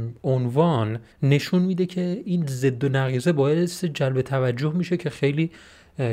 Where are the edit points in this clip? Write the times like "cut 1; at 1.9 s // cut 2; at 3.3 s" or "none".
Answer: cut 1; at 1.1 s